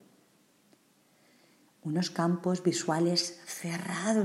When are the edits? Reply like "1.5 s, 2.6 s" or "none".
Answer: 1.7 s